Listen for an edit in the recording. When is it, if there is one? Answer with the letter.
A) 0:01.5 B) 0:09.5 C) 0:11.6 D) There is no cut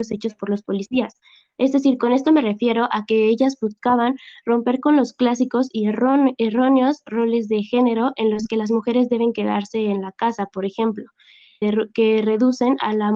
C